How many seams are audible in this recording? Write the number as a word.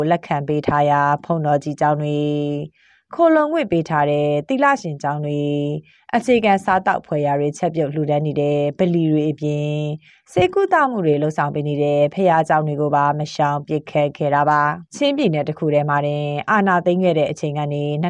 one